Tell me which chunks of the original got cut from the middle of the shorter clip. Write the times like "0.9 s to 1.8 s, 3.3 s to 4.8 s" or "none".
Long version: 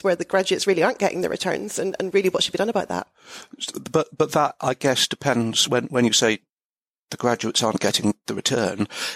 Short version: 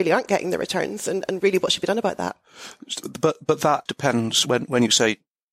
4.6 s to 5.1 s